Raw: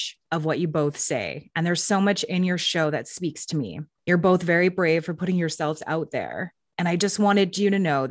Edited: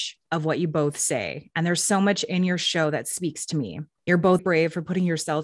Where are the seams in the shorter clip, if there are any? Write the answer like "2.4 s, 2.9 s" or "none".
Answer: 4.4 s